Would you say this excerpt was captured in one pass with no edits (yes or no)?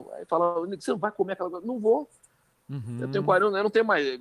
yes